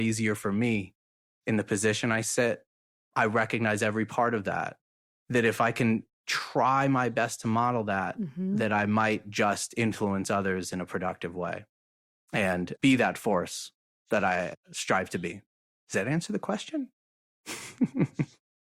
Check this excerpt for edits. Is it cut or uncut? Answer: uncut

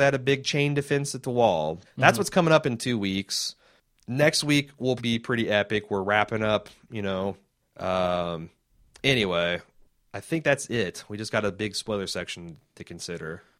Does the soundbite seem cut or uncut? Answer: cut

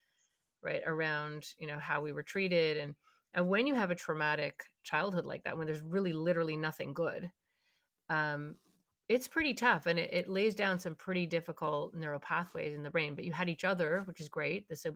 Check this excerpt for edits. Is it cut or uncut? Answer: uncut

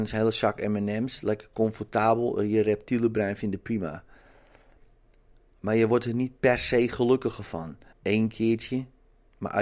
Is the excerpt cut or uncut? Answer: cut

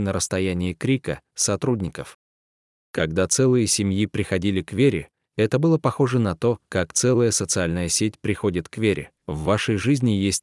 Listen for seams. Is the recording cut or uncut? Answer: cut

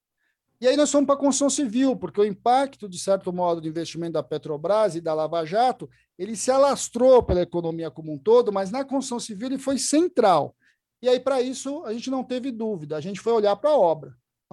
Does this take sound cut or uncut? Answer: uncut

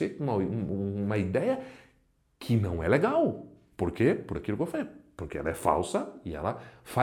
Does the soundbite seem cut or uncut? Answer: uncut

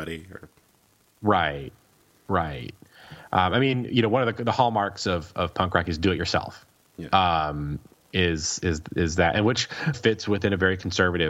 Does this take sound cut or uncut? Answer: cut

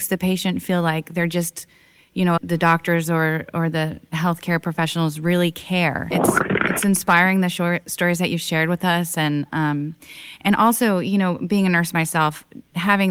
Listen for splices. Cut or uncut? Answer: cut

